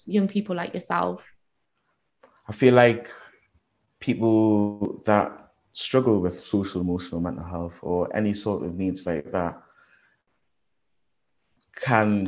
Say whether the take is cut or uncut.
uncut